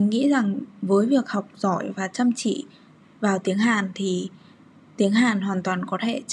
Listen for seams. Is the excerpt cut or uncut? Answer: uncut